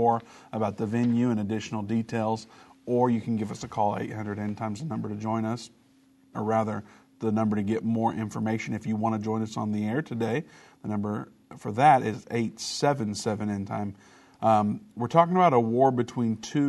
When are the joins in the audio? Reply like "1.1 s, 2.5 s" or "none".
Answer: 6.3 s